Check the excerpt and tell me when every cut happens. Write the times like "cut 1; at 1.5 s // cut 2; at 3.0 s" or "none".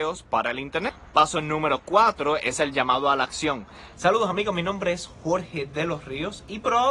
cut 1; at 3.9 s